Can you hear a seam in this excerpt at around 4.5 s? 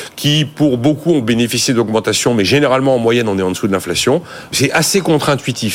yes; 1 cut; at 4.5 s

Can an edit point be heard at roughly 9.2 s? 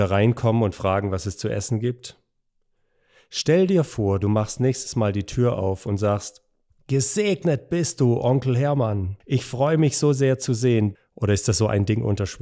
yes; 2 cuts; at 9.2 s, 11.0 s

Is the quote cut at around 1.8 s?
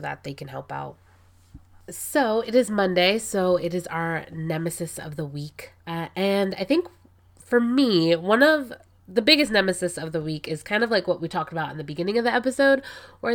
no; 1 cut; at 5.8 s

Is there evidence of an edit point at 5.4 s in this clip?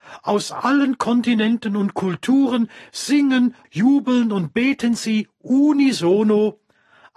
no; 1 cut; at 3.6 s

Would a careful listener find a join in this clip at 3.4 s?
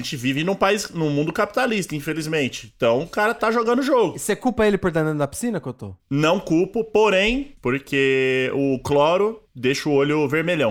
yes; 2 cuts; at 3.4 s, 7.6 s

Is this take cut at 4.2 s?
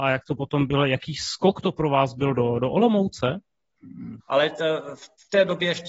yes; 1 cut; at 4.2 s

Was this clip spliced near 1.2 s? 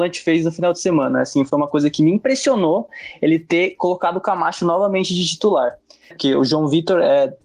no; 1 cut; at 6.1 s

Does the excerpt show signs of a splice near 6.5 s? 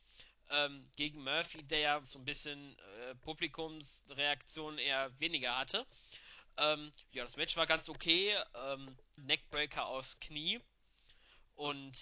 no; 2 cuts; at 2.0 s, 9.2 s

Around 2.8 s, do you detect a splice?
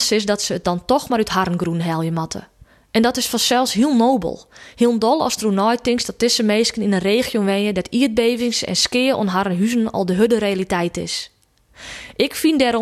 no; 0 cuts

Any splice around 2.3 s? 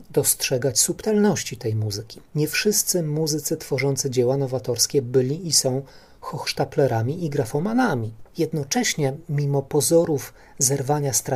yes; 2 cuts; at 2.3 s, 8.3 s

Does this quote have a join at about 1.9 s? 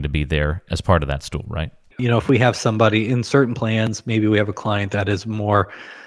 yes; 1 cut; at 1.9 s

